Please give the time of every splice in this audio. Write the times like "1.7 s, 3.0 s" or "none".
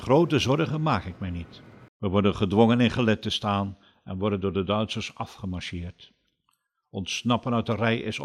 1.9 s